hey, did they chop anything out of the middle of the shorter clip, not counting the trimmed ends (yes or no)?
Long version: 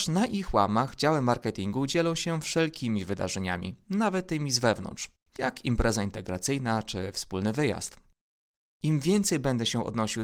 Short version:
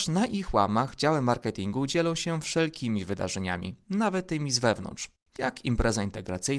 no